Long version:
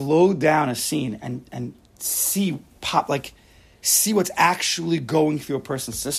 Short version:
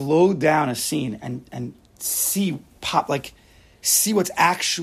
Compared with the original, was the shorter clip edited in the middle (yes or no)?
no